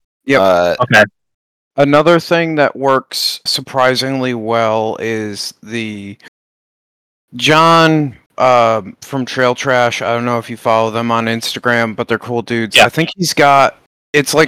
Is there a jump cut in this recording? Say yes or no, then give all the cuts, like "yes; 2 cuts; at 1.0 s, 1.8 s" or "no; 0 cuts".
yes; 1 cut; at 3.5 s